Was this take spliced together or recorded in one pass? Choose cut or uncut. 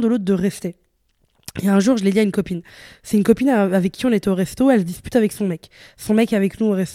uncut